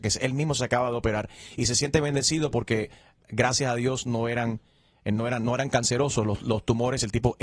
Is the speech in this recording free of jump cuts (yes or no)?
yes